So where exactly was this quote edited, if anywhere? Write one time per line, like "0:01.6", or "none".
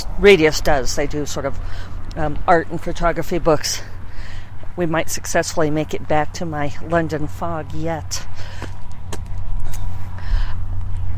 0:04.7